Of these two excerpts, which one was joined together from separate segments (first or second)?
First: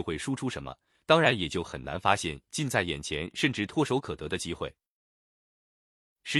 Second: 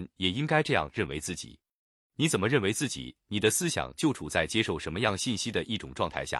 first